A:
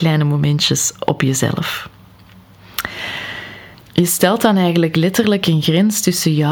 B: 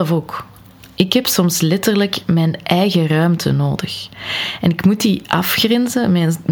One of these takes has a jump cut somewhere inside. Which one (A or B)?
A